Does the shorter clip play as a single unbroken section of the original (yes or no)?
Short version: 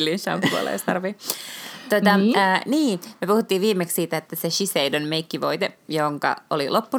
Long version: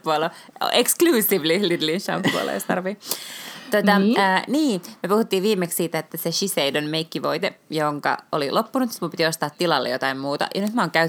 yes